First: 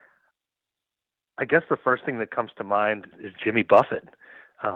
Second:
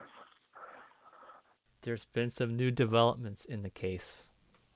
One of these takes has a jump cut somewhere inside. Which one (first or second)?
first